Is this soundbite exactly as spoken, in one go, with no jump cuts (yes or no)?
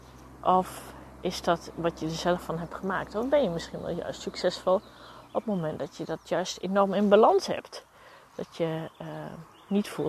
yes